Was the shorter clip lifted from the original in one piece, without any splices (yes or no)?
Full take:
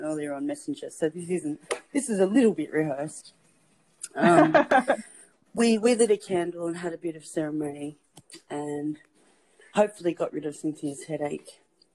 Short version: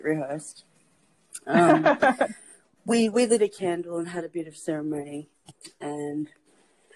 yes